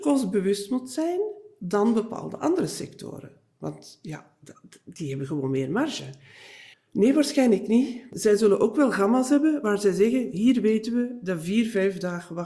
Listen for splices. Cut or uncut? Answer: cut